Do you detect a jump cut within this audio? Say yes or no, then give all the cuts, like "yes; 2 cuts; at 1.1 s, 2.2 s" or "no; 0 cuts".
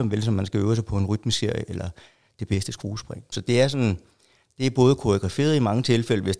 yes; 1 cut; at 3.3 s